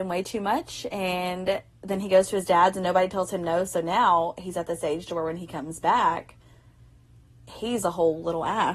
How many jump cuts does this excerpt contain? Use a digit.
0